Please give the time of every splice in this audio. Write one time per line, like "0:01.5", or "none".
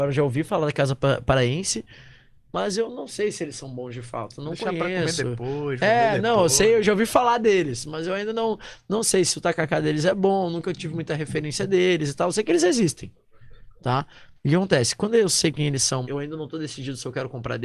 0:14.3
0:16.0